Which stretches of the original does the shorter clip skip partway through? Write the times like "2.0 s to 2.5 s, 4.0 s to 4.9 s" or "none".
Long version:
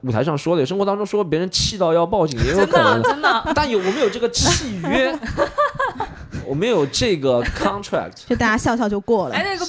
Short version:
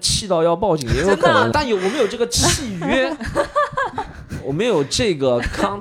3.0 s to 3.5 s